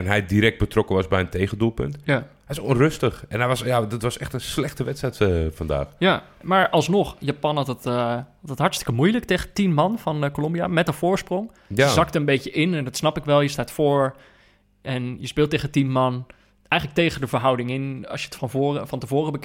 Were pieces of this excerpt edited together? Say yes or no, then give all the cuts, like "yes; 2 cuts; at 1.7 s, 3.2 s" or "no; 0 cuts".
no; 0 cuts